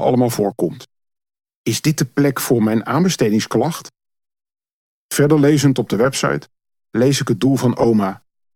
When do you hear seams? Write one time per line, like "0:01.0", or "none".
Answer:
none